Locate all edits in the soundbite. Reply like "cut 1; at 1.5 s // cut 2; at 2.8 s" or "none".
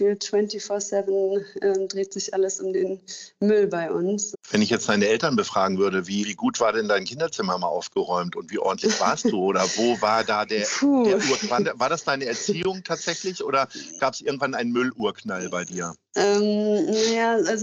cut 1; at 4.3 s // cut 2; at 6.2 s